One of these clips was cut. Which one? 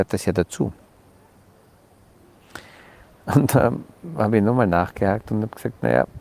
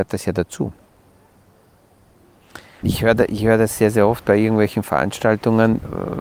second; 1 cut; at 2.8 s

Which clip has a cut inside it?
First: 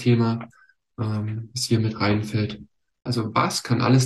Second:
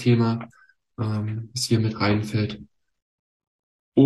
first; 1 cut; at 3.1 s

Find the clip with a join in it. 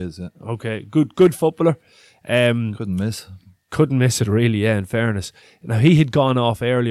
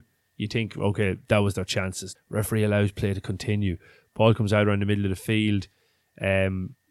second; 1 cut; at 2.2 s

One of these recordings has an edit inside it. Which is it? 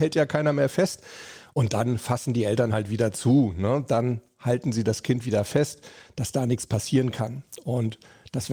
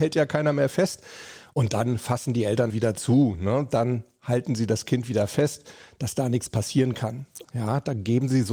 second; 2 cuts; at 2.7 s, 7.4 s

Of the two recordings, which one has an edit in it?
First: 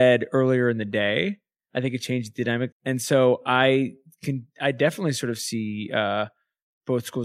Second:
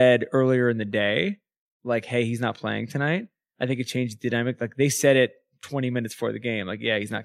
first; 2 cuts; at 1.6 s, 2.7 s

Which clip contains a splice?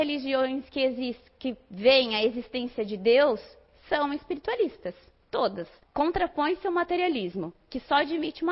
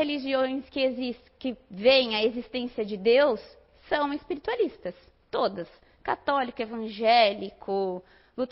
first; 1 cut; at 5.8 s

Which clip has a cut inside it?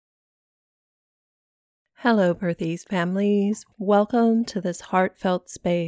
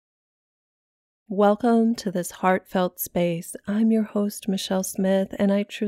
second; 1 cut; at 1.3 s

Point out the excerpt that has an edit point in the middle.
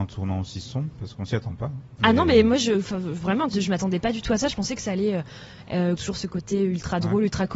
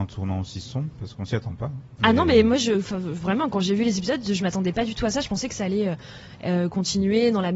first; 2 cuts; at 3.5 s, 6.0 s

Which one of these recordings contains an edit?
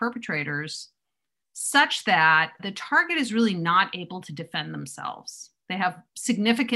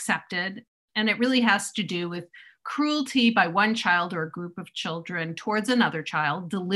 first; 1 cut; at 2.6 s

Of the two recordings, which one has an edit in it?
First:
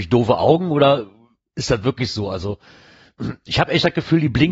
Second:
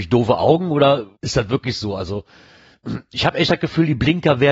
second; 1 cut; at 1.1 s

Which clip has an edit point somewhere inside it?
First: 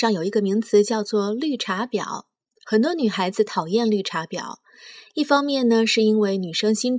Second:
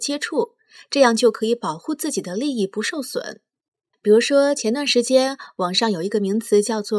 second; 1 cut; at 3.9 s

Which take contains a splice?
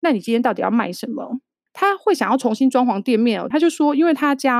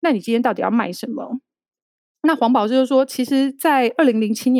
first; 2 cuts; at 1.7 s, 3.5 s

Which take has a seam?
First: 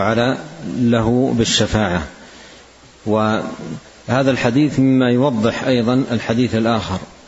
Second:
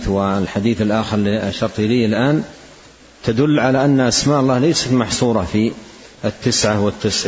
second; 1 cut; at 6.1 s

